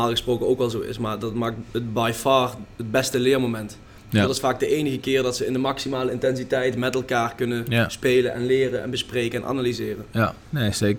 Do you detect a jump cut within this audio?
no; 0 cuts

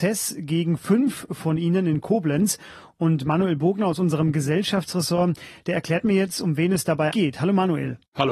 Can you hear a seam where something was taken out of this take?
yes; 1 cut; at 7.1 s

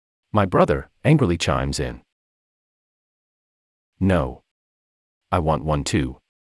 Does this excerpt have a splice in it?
yes; 1 cut; at 0.9 s

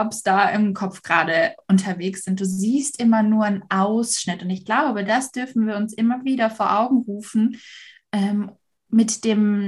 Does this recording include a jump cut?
no; 0 cuts

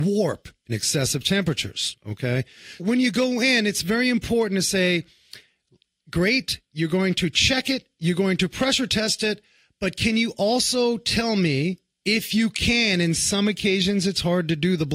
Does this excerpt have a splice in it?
yes; 1 cut; at 2.8 s

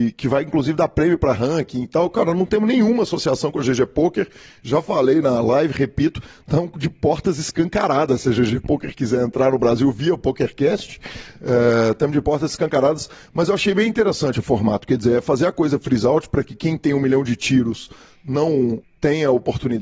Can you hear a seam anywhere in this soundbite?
no; 0 cuts

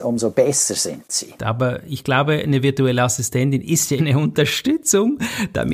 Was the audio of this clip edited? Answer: yes; 2 cuts; at 1.4 s, 4.0 s

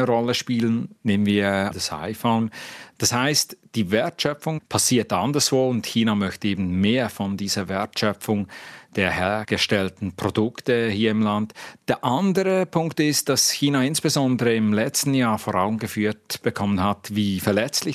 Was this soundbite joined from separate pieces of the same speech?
yes; 3 cuts; at 1.0 s, 2.9 s, 11.8 s

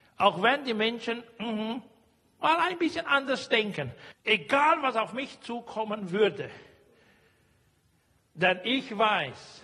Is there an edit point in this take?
yes; 1 cut; at 4.1 s

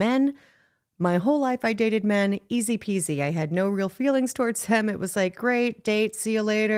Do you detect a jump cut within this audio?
no; 0 cuts

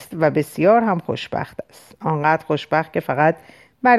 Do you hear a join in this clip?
no; 0 cuts

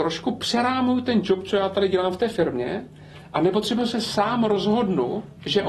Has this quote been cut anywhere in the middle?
no; 0 cuts

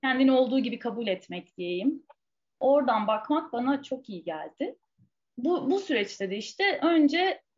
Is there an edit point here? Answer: no; 0 cuts

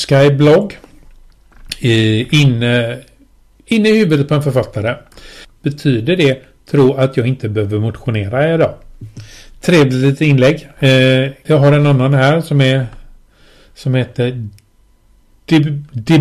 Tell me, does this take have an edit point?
yes; 2 cuts; at 5.4 s, 11.5 s

